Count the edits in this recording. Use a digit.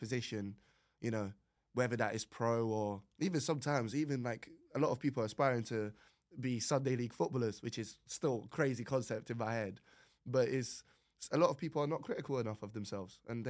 0